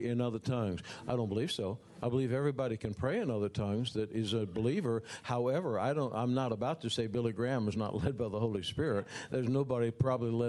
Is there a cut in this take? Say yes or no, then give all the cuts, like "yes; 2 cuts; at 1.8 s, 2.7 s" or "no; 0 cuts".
no; 0 cuts